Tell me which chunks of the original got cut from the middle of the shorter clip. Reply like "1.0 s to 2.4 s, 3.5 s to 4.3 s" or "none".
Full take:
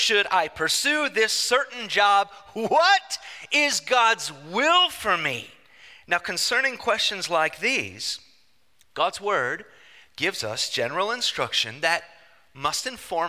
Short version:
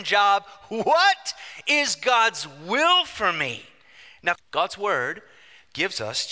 6.2 s to 8.8 s